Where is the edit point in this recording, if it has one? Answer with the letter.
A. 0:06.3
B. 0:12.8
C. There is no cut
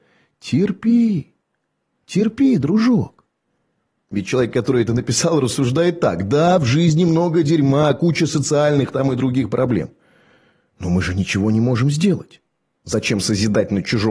B